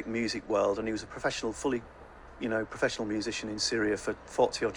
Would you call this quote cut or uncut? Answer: uncut